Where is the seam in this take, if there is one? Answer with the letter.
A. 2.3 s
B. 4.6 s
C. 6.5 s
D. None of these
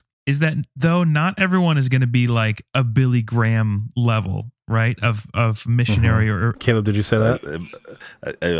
C